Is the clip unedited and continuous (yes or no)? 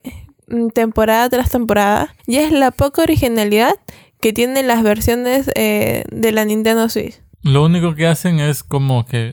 no